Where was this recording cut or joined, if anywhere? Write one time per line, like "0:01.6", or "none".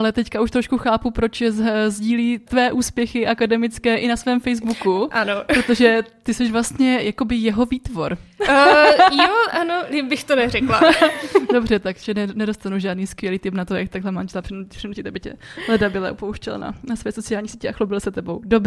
none